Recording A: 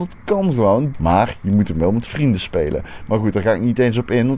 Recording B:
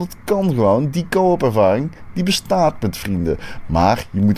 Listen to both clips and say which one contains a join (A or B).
A